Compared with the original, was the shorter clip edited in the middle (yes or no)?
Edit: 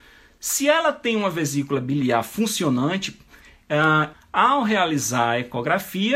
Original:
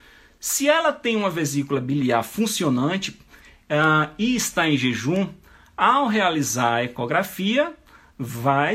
yes